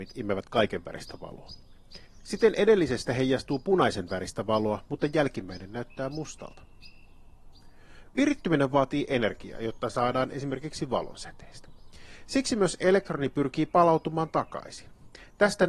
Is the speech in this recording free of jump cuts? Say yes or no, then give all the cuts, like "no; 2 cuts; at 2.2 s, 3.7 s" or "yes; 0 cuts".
yes; 0 cuts